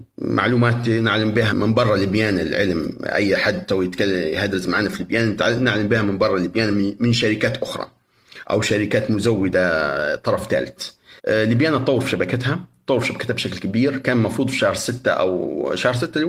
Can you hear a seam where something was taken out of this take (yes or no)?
yes